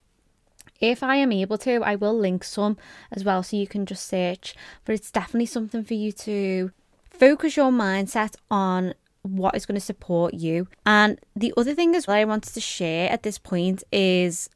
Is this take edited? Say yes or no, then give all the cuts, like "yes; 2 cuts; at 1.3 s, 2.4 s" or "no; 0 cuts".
yes; 2 cuts; at 10.8 s, 12.1 s